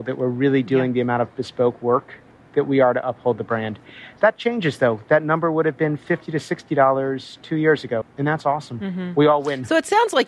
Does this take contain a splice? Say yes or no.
yes